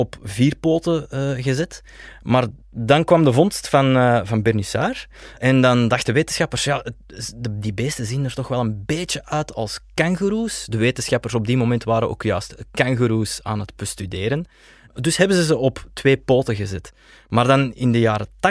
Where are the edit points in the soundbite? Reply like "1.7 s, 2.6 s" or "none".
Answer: none